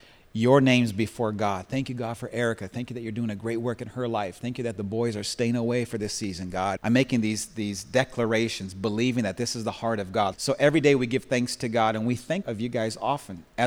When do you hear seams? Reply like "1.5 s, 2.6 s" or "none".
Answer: 6.8 s, 10.3 s, 12.4 s